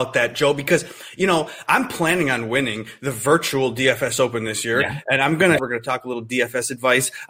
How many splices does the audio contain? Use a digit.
1